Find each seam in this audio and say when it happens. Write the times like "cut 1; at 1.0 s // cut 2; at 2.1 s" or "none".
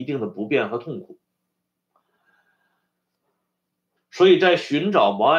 cut 1; at 4.0 s